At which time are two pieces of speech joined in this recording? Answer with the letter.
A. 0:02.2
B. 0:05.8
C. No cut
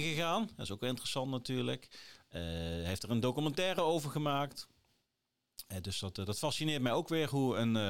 A